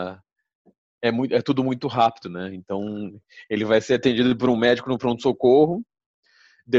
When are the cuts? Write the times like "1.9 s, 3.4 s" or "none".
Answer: none